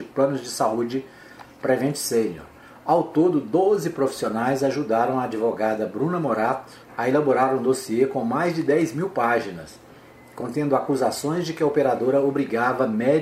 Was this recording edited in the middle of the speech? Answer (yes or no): yes